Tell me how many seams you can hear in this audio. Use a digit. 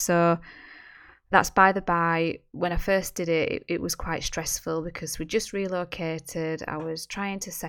1